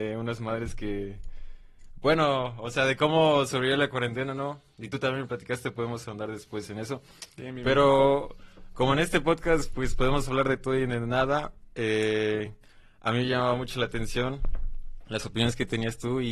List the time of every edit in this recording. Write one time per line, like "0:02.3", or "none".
none